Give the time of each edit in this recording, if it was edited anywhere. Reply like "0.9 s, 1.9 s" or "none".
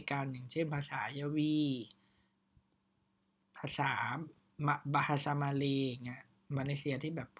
none

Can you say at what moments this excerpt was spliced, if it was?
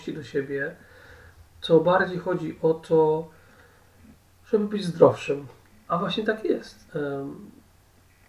5.7 s, 6.9 s

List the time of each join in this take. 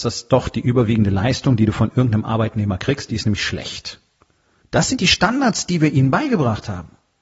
4.6 s

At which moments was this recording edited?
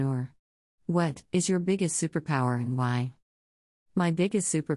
1.3 s

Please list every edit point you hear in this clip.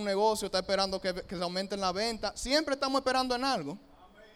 none

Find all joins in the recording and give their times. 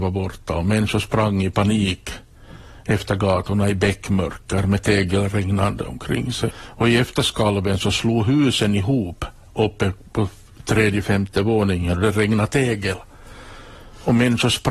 6.5 s, 11.0 s

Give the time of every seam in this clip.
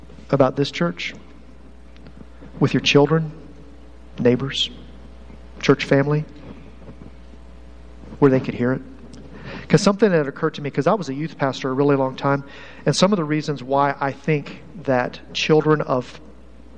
4.1 s

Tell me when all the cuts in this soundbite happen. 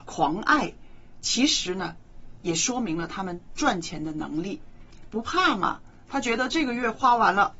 none

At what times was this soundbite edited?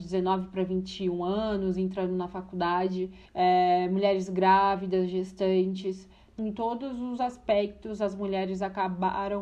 3.3 s, 6.4 s

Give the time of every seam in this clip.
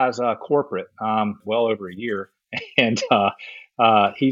1.4 s

